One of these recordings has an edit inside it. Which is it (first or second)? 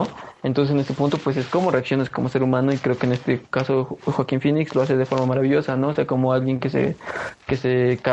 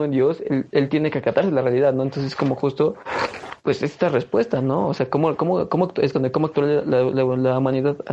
second